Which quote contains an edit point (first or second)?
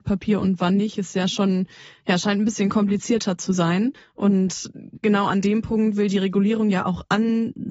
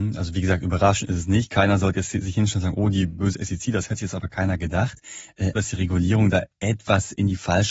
second